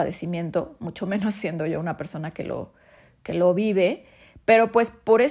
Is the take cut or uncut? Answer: uncut